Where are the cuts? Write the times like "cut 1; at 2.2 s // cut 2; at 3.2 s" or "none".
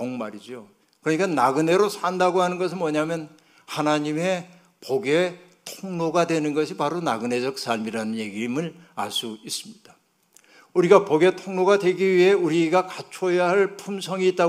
none